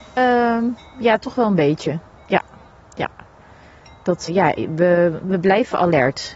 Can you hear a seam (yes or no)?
yes